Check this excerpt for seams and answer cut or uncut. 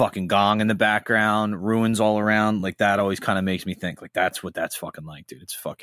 uncut